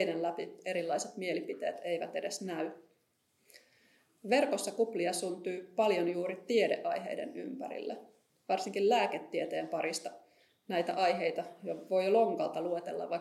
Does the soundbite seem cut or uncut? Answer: uncut